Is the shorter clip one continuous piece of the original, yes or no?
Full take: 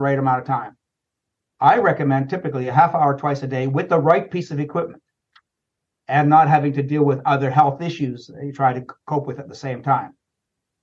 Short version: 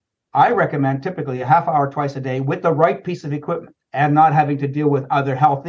no